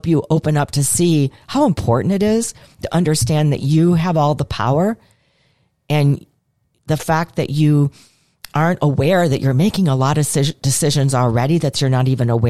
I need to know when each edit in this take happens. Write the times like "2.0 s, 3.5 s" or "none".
none